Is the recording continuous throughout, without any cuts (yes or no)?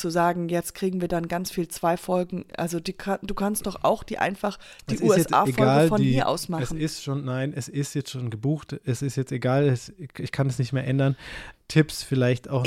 no